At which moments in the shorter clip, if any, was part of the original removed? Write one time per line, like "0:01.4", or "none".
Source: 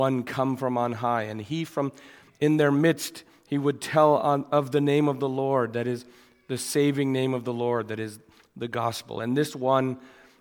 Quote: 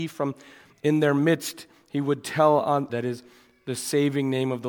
0:02.9